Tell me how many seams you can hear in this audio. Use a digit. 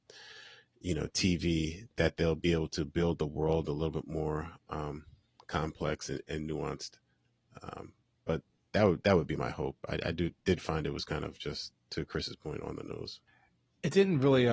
0